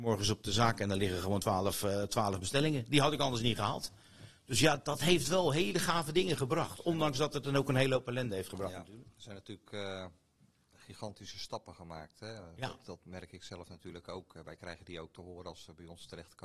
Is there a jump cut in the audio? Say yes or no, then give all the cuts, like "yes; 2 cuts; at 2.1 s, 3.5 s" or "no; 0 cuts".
no; 0 cuts